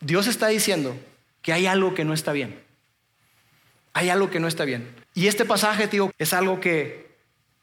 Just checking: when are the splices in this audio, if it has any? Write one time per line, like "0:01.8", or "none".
0:05.0
0:06.1